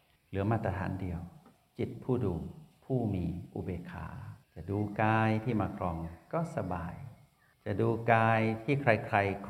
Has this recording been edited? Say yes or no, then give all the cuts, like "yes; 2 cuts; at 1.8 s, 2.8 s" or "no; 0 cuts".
yes; 1 cut; at 4.4 s